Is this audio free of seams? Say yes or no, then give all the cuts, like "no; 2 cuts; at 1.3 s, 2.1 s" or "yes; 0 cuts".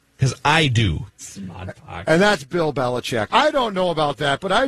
no; 2 cuts; at 1.2 s, 3.3 s